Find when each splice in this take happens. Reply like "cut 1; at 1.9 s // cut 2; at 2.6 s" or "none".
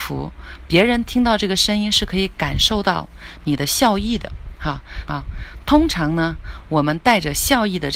cut 1; at 5.1 s